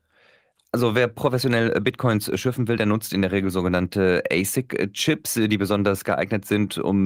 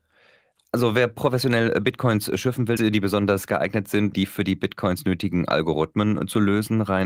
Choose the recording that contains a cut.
second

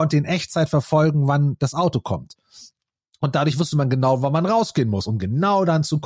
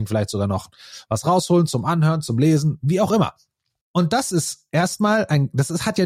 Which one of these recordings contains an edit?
second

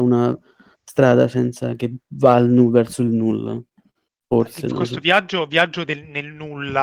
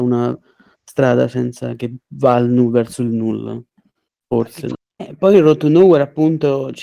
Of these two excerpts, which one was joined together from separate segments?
second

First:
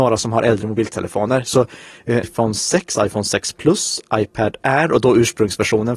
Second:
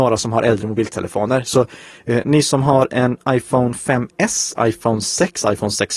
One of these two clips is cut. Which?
first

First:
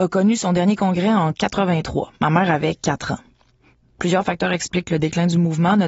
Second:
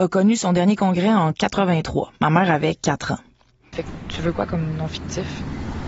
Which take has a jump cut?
second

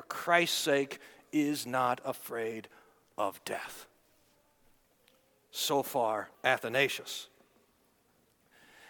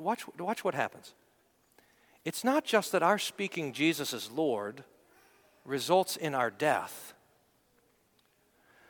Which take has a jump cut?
first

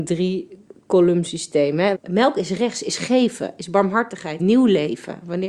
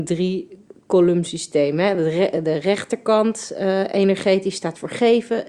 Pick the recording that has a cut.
first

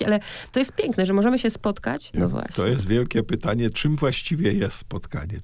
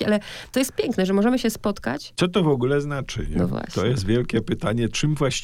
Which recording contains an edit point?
first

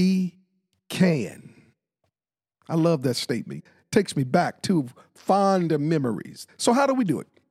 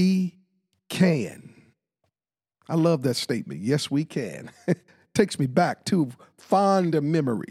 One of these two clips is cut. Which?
first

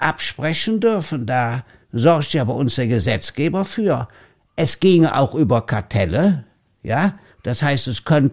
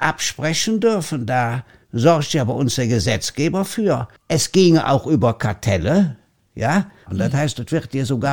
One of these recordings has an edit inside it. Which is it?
second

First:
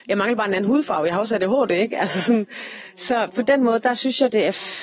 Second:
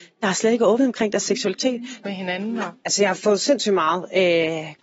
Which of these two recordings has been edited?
second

